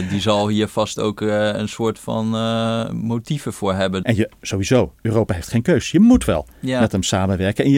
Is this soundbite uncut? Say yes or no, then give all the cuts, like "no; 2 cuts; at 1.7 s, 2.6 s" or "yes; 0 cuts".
no; 1 cut; at 4.0 s